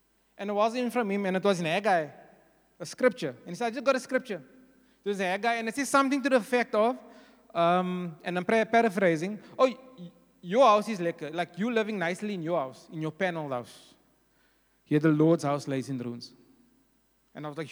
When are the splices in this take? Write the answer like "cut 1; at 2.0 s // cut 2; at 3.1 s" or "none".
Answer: none